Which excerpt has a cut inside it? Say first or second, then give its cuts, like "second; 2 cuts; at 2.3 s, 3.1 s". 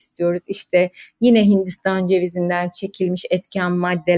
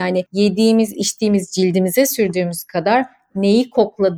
second; 1 cut; at 0.9 s